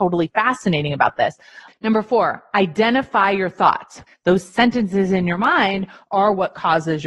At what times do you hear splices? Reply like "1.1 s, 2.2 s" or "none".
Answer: 1.7 s, 4.1 s